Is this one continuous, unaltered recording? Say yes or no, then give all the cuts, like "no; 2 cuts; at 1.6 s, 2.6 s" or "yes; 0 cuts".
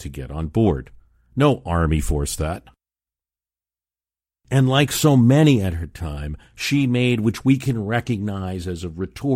yes; 0 cuts